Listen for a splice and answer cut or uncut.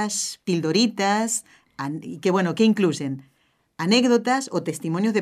uncut